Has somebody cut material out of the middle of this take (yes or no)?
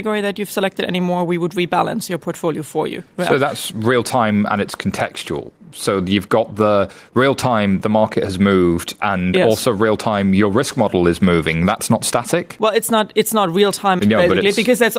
yes